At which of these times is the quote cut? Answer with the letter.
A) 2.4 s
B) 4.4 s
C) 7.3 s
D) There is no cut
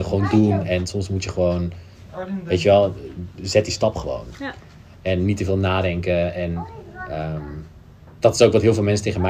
D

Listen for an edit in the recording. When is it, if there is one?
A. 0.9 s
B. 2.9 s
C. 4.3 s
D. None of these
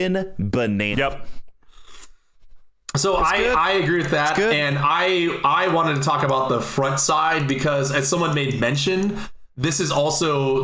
A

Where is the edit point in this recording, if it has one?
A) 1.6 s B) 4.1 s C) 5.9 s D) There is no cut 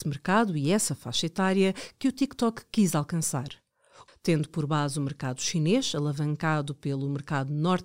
B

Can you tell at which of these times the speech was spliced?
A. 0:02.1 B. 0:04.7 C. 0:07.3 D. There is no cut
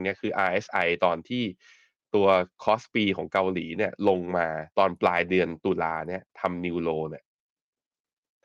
B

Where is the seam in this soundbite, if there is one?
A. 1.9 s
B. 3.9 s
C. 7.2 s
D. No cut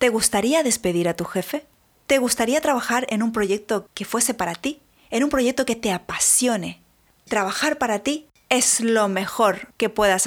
B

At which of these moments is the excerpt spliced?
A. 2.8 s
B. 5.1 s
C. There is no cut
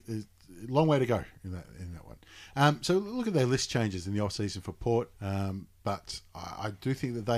B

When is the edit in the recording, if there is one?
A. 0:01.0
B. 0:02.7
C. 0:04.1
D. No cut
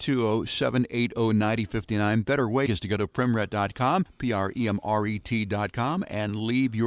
B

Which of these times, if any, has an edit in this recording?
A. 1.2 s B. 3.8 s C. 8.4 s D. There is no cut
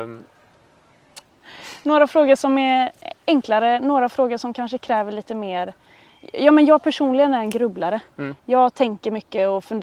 A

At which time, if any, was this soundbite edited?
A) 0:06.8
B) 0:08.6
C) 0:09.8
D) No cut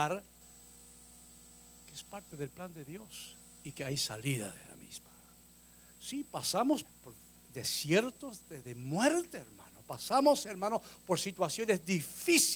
A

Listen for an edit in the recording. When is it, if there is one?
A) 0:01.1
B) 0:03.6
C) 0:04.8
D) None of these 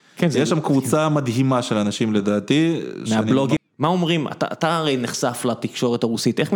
B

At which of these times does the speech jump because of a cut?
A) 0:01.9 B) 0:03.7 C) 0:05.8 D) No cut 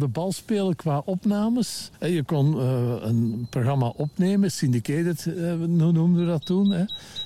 D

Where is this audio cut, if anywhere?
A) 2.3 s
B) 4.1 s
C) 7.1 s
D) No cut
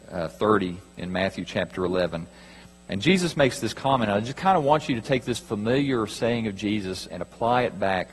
C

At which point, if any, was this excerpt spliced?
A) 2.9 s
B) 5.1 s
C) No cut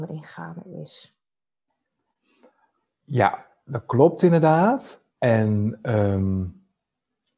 B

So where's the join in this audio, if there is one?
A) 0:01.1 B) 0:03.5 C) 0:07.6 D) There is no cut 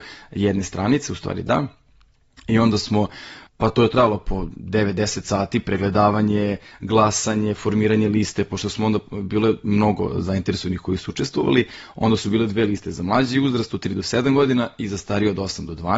B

